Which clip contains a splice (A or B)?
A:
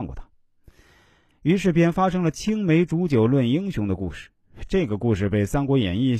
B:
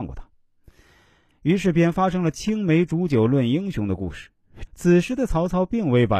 B